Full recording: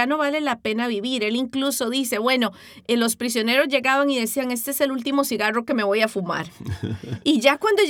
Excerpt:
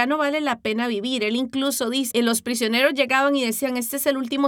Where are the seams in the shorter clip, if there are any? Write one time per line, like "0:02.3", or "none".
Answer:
0:02.1

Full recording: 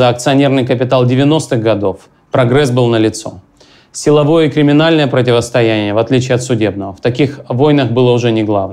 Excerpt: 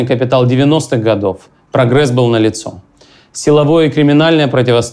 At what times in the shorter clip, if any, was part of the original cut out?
none

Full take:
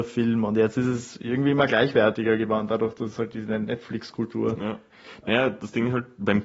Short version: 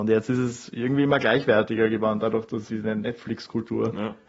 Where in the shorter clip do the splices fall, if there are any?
0:02.7

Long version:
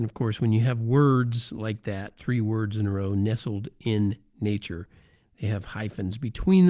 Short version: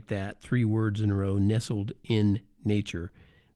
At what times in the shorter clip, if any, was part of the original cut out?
none

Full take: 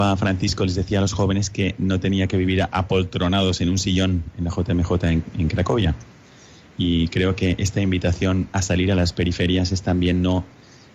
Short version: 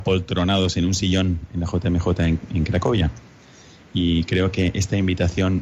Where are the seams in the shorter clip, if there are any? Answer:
none

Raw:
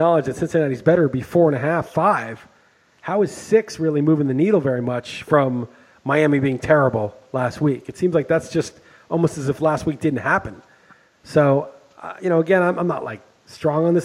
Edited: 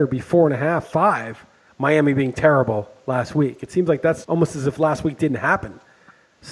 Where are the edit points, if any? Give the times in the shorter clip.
0:01.7
0:04.2

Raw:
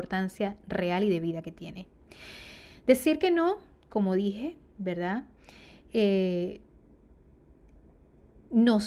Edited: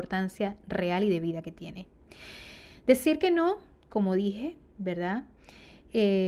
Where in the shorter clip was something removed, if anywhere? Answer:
none

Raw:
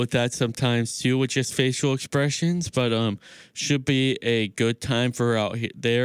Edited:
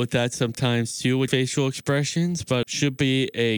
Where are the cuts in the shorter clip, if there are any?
0:01.3
0:02.6

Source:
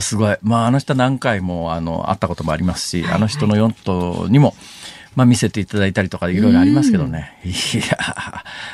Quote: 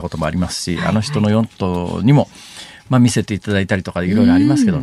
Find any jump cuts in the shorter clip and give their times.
none

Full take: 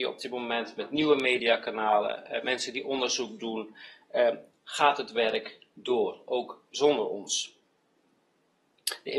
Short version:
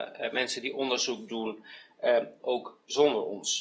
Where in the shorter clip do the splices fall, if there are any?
0:02.4

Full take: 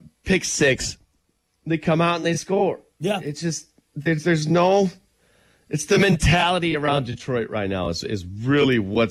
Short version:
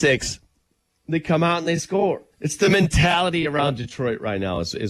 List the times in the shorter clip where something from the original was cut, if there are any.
0:02.3

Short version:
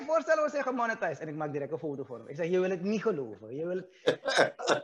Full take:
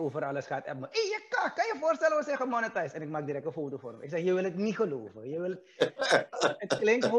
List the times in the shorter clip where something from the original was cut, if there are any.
none

